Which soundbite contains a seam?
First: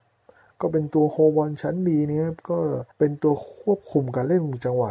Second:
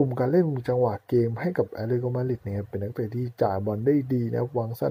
first; 1 cut; at 2.9 s

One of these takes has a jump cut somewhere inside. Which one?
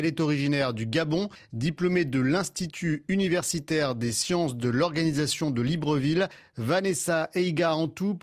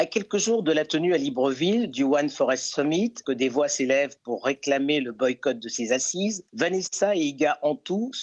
second; 1 cut; at 3.2 s

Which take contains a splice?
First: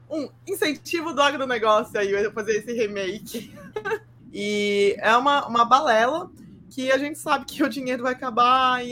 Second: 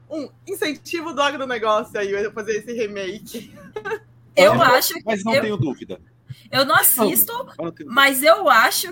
first; 1 cut; at 4.2 s

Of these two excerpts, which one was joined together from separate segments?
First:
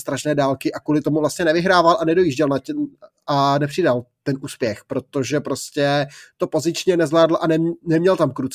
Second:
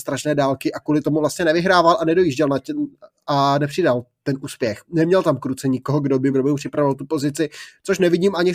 second; 2 cuts; at 4.8 s, 6.3 s

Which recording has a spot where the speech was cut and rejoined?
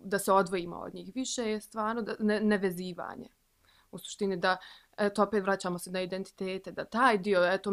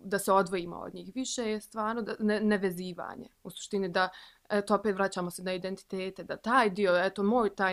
second; 1 cut; at 3.4 s

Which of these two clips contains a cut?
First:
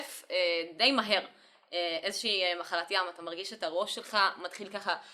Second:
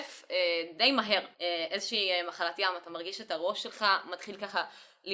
second; 1 cut; at 1.3 s

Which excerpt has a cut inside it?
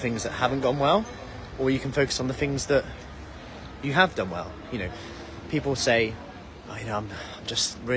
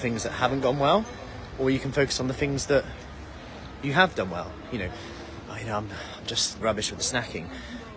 second; 2 cuts; at 5.4 s, 6.6 s

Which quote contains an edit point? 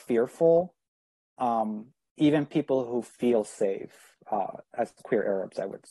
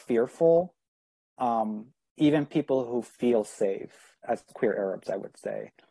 second; 1 cut; at 4.2 s

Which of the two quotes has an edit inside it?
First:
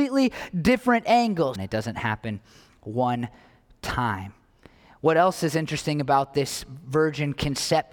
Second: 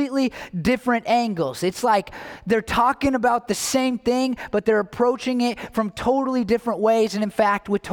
first; 1 cut; at 1.6 s

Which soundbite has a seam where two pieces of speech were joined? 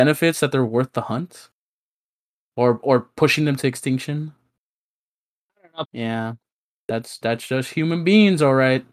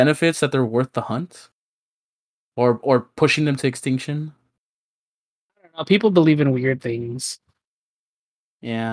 first; 1 cut; at 5.9 s

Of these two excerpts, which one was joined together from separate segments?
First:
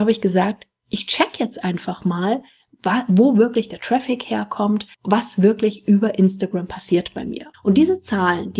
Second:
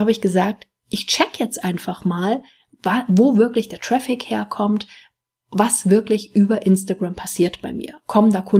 first; 2 cuts; at 4.9 s, 7.5 s

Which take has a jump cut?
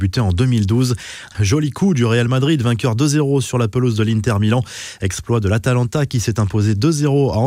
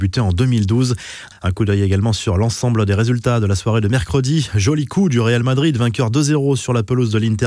first; 1 cut; at 1.3 s

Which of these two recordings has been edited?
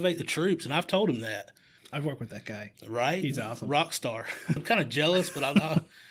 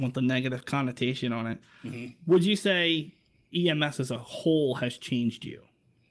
first; 2 cuts; at 1.8 s, 4.6 s

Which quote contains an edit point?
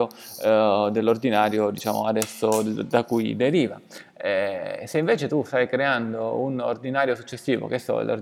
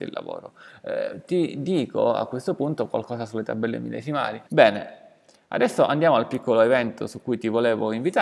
second; 1 cut; at 4.5 s

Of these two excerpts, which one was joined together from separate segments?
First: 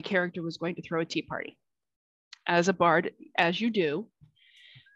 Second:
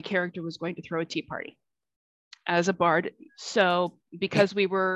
second; 1 cut; at 3.3 s

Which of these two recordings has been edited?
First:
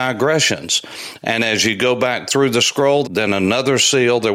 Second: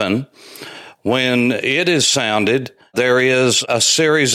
first; 2 cuts; at 1.2 s, 3.0 s

